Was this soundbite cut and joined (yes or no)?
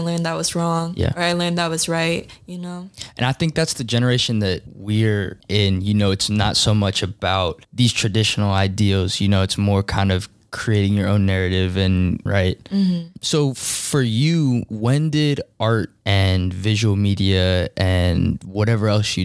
yes